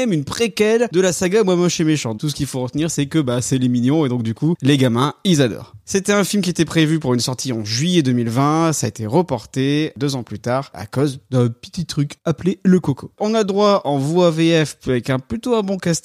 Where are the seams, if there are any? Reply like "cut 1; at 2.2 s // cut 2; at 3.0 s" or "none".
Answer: cut 1; at 2.2 s